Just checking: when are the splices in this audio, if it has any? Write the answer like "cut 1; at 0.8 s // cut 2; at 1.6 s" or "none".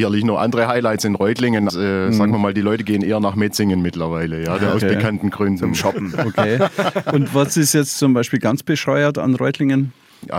cut 1; at 1.7 s